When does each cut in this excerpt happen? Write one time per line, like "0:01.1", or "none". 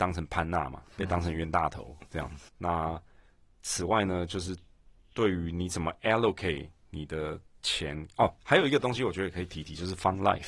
0:02.5